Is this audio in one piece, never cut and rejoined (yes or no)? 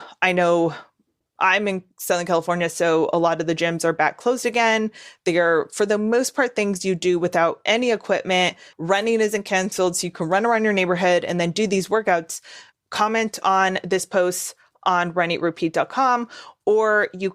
no